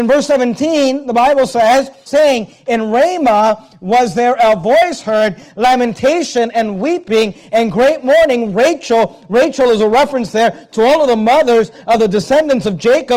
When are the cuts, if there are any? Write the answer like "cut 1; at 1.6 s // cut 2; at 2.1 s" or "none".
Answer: cut 1; at 2.1 s